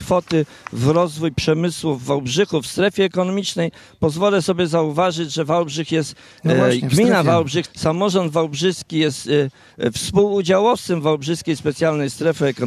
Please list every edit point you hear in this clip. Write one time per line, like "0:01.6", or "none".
0:07.6